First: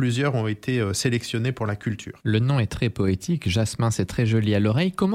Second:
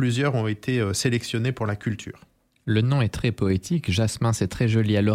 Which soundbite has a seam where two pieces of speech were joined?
first; 1 cut; at 2.2 s

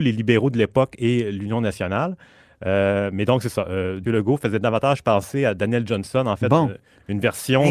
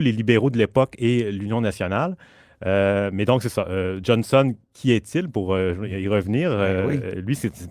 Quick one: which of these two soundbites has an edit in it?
first; 1 cut; at 4.0 s

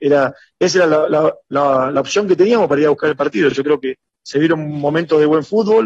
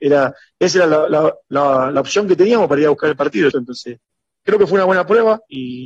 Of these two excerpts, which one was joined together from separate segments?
second; 1 cut; at 3.5 s

